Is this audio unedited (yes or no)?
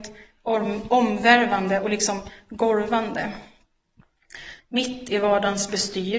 no